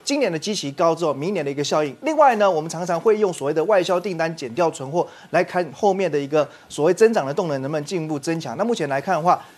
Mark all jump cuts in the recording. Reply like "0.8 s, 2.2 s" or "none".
none